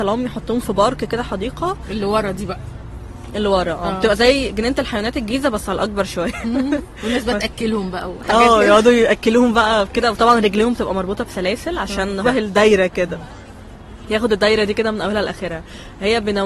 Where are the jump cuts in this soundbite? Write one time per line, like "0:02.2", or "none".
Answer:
0:12.2